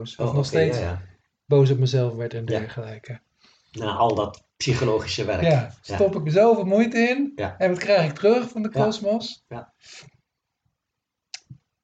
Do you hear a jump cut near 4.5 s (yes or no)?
yes